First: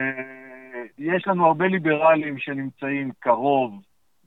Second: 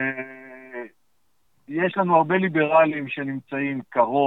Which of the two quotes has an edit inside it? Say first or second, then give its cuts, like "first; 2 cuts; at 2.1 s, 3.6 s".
first; 1 cut; at 0.9 s